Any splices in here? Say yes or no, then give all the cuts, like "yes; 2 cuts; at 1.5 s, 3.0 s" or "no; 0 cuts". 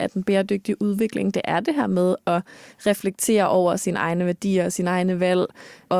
no; 0 cuts